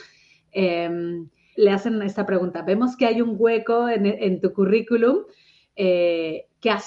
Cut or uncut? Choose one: cut